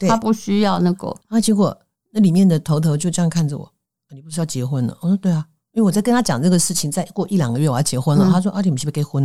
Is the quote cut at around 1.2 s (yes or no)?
yes